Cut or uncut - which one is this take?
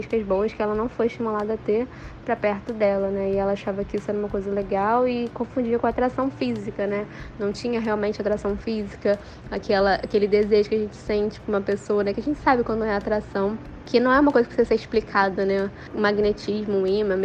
uncut